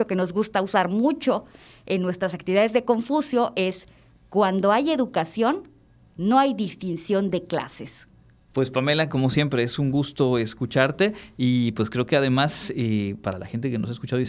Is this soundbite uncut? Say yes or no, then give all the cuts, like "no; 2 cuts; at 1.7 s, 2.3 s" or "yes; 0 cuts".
no; 1 cut; at 8.5 s